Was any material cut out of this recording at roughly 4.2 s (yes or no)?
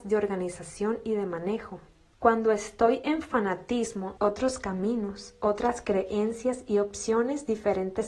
yes